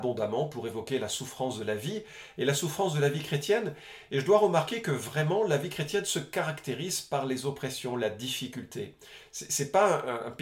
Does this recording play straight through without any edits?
yes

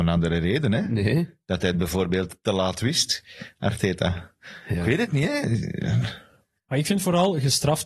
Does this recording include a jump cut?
no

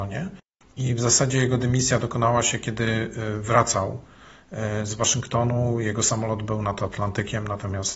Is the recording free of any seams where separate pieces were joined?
yes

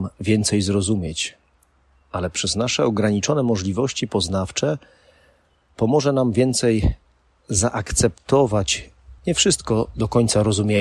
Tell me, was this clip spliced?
yes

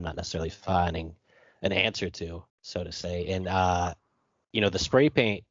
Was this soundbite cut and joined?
yes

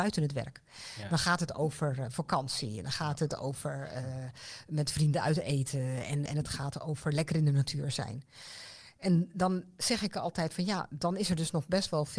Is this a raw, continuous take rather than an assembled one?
no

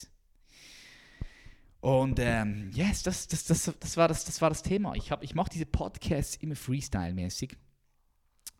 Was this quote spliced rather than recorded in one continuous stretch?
no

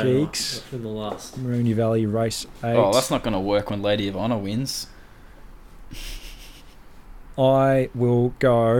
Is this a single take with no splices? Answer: yes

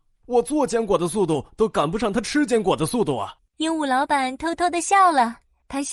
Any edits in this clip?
yes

